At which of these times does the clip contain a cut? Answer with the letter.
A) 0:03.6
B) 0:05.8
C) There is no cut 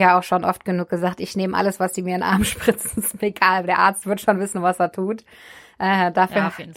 C